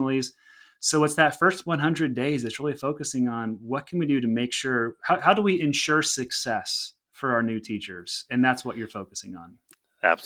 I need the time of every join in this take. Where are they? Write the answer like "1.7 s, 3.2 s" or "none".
7.0 s